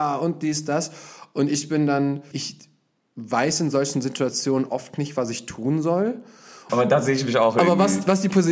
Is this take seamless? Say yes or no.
no